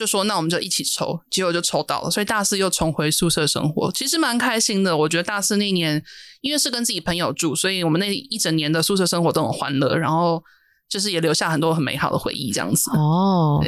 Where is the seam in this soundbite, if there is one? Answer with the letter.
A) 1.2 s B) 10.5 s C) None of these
C